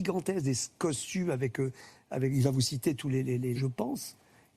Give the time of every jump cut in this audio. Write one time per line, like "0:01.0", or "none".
0:03.6